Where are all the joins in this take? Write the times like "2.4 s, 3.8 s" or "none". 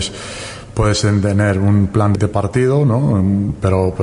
2.2 s